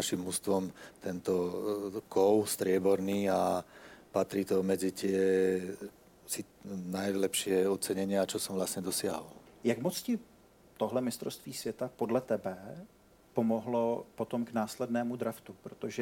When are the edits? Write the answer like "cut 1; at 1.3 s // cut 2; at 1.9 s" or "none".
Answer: cut 1; at 9.5 s